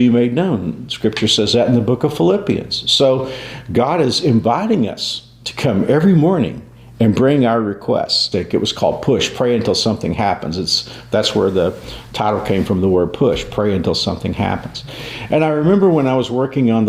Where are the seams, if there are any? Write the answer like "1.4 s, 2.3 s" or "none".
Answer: 8.3 s